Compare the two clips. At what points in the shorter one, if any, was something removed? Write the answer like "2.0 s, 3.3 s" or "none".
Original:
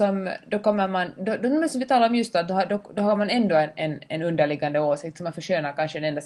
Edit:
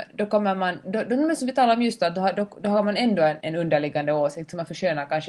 3.4 s